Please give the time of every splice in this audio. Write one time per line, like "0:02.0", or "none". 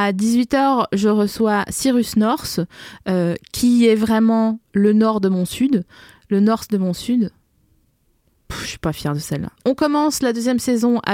0:09.6